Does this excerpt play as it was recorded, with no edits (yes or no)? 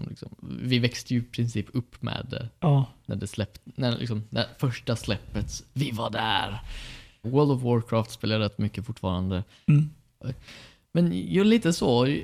no